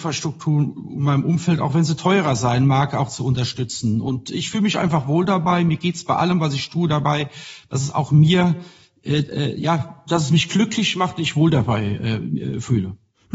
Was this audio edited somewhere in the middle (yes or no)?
no